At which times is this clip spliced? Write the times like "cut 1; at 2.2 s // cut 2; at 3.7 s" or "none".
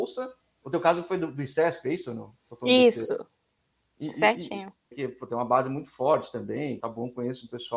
cut 1; at 4.9 s // cut 2; at 6.8 s